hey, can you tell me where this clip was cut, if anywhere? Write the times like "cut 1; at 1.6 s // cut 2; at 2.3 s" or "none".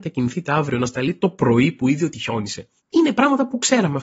none